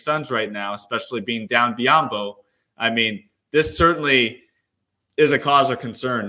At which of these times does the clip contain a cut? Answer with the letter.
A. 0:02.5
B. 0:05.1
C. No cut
C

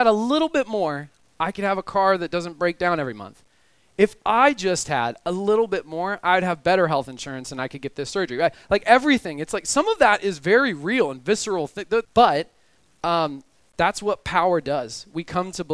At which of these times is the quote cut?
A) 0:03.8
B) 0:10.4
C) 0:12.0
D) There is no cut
C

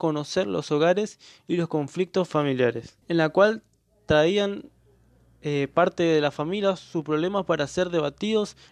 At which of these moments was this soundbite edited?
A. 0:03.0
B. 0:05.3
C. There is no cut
A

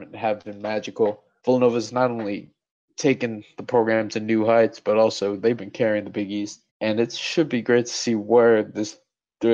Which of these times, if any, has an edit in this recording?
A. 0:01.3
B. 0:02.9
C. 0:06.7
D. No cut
C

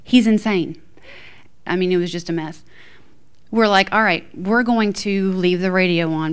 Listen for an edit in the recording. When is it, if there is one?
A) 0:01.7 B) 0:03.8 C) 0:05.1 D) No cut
A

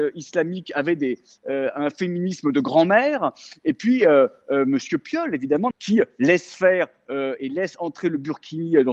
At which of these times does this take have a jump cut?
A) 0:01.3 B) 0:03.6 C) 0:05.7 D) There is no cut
C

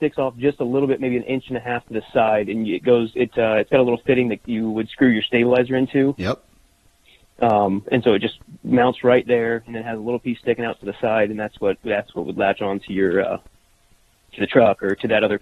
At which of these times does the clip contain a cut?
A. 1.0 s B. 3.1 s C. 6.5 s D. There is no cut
D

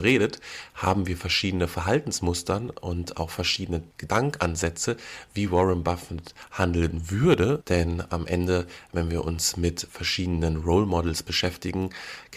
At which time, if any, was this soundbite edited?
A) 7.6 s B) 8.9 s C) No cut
A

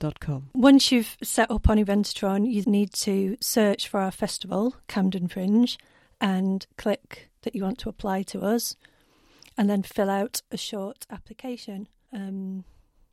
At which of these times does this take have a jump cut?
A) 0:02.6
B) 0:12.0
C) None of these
A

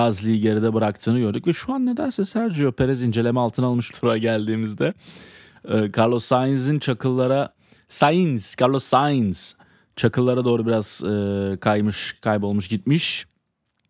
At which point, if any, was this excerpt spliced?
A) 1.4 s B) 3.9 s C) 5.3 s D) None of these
B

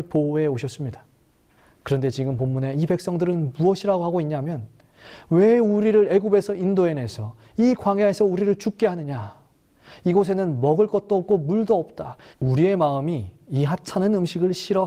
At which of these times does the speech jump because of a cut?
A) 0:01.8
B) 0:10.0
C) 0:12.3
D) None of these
C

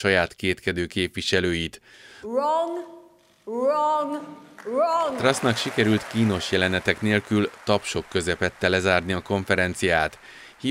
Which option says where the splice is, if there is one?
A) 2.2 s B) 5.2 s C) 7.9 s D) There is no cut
A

